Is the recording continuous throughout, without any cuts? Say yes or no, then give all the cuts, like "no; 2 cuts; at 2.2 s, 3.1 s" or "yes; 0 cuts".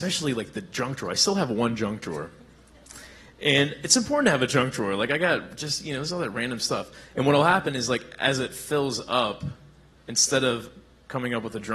yes; 0 cuts